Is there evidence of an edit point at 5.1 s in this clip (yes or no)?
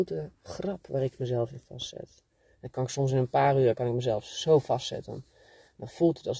no